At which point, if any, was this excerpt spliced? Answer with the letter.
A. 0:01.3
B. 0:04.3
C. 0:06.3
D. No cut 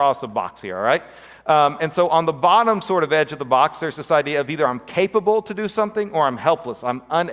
D